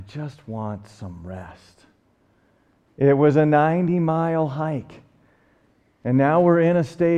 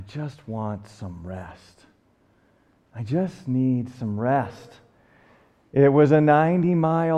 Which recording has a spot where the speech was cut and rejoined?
first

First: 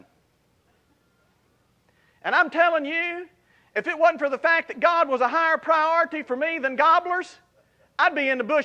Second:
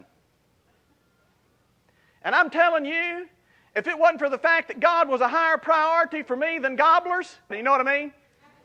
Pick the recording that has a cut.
second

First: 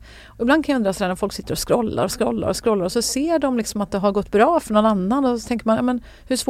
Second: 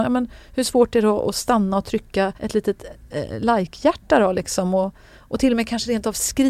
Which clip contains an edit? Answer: second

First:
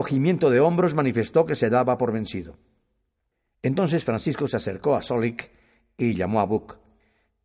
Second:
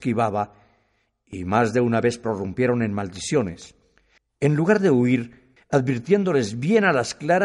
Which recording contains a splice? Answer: second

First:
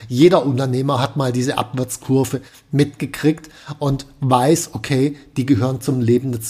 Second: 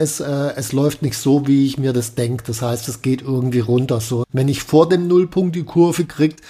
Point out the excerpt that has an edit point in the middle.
second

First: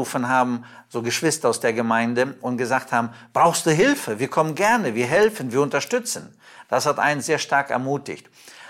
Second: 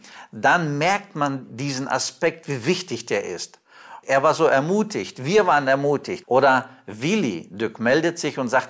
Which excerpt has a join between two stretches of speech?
second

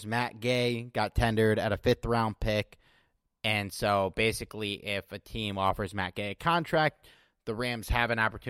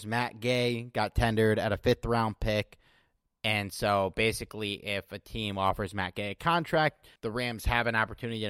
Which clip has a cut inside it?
second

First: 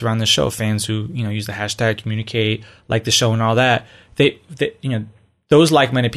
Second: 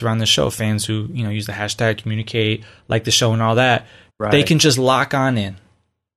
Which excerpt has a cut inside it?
second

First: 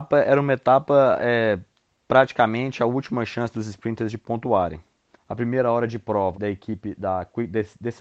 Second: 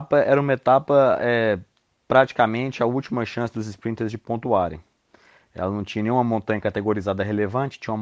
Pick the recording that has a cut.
first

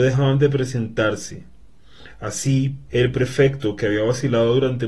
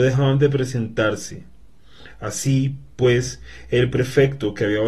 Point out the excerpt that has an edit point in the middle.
first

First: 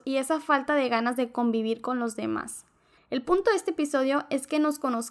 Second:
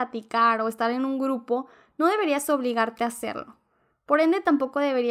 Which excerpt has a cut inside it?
first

